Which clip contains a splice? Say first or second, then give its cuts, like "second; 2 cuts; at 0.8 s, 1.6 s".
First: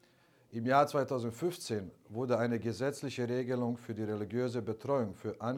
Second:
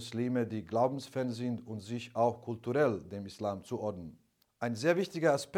second; 1 cut; at 4.4 s